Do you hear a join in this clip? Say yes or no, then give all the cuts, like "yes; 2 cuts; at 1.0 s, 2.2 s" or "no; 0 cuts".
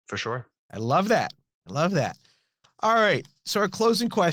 no; 0 cuts